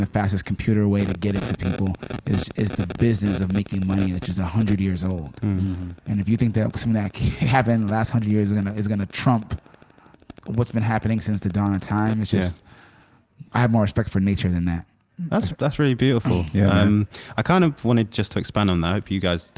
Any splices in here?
no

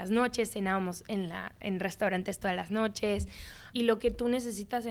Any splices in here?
yes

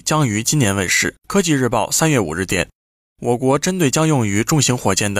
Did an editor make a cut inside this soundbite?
yes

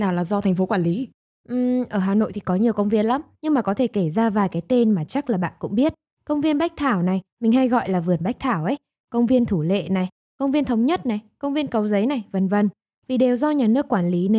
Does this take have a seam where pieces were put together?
no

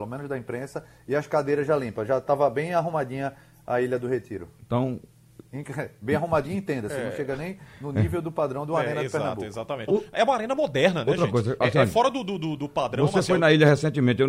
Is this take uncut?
no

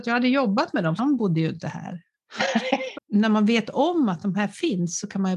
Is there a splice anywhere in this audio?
yes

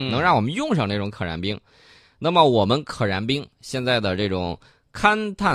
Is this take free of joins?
yes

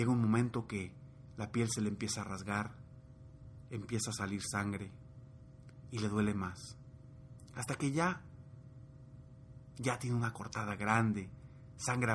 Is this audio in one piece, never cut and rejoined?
yes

